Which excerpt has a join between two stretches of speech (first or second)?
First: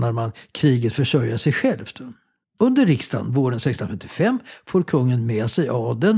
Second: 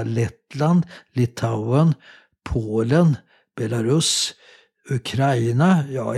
first